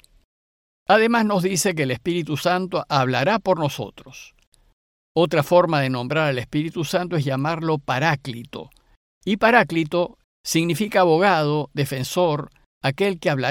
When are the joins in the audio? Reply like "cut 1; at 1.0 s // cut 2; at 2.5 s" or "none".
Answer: cut 1; at 10.2 s

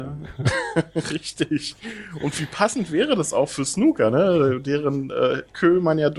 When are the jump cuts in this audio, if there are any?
none

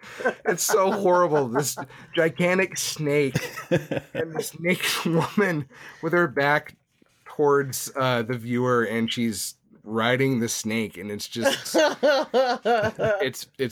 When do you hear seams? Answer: none

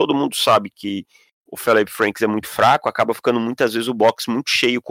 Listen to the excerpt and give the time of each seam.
none

